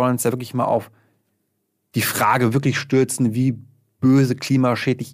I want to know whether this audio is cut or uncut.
uncut